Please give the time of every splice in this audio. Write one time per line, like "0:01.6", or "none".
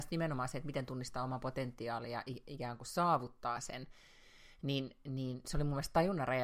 none